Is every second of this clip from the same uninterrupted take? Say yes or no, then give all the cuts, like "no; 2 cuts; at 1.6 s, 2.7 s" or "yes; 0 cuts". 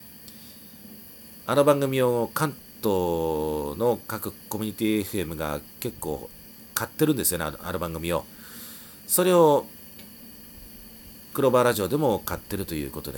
yes; 0 cuts